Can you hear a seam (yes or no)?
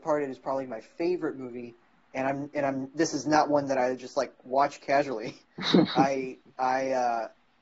no